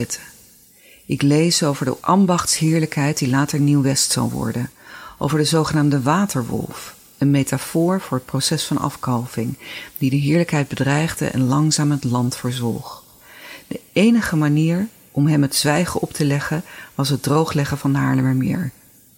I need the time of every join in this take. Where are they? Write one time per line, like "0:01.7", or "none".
none